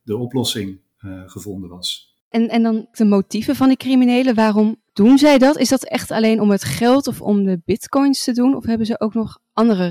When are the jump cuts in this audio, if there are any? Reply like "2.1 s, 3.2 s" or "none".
none